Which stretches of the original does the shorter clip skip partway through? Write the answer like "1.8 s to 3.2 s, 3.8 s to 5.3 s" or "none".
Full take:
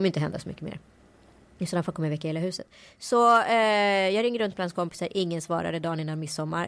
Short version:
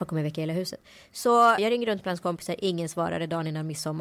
3.4 s to 4.1 s